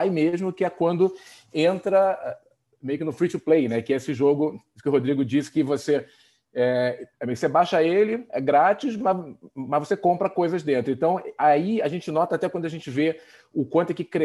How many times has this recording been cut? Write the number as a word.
one